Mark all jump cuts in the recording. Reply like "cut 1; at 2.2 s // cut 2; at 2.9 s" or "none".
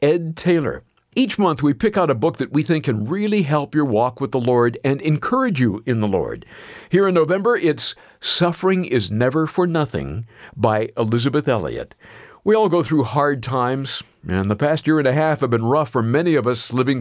none